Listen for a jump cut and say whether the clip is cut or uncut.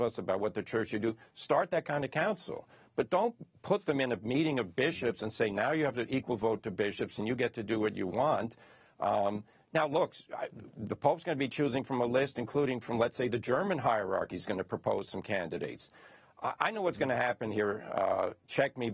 uncut